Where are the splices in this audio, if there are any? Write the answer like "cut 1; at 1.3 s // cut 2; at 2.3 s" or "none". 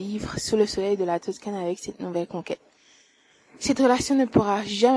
none